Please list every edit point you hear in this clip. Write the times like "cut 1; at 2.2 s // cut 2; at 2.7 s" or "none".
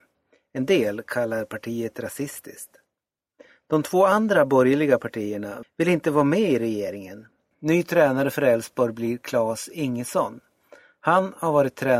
cut 1; at 5.6 s // cut 2; at 7.5 s